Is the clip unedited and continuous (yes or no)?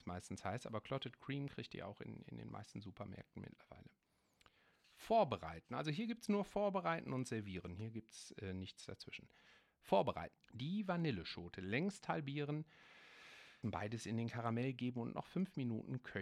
no